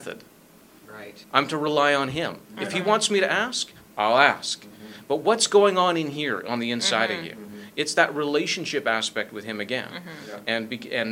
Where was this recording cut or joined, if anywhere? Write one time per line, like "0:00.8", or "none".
0:01.2